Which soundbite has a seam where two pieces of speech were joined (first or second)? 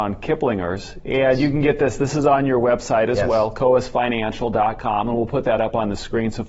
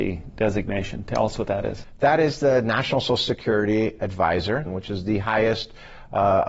second